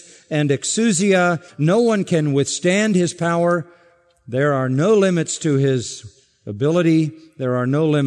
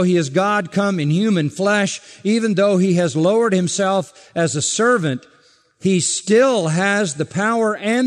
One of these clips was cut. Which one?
first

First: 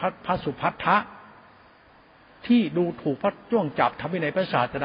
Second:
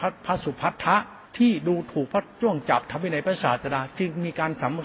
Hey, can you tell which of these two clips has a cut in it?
second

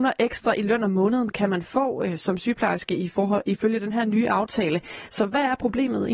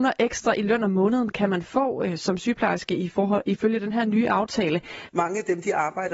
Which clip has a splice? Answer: second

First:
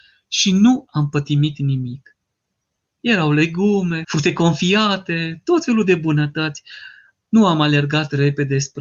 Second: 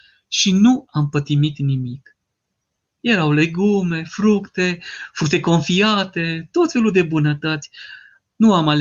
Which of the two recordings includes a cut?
first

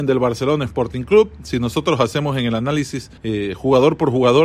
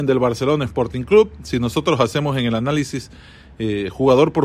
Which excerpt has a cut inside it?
first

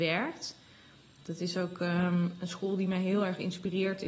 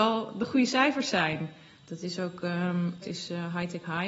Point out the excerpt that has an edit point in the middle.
second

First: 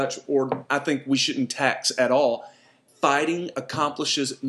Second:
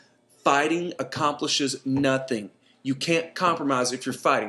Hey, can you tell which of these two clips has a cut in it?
first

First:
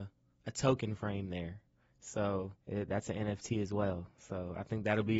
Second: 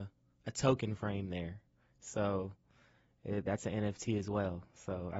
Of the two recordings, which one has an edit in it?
first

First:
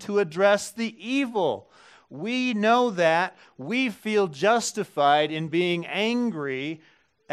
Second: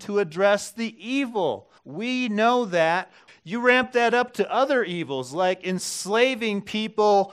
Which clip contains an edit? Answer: second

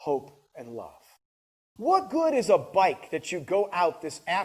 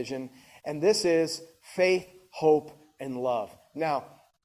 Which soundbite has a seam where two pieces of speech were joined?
first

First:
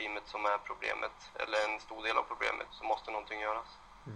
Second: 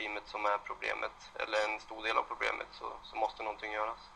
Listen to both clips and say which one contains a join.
first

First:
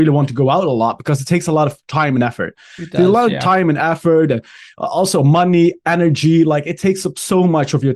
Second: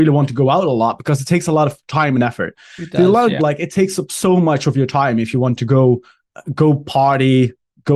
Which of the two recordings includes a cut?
second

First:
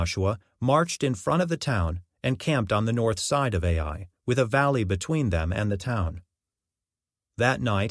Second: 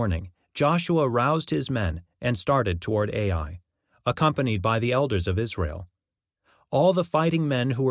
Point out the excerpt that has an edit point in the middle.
first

